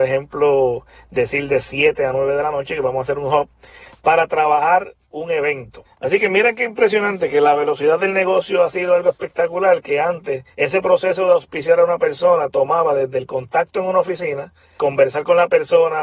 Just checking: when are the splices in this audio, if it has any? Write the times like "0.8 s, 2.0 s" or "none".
5.8 s, 10.5 s, 14.8 s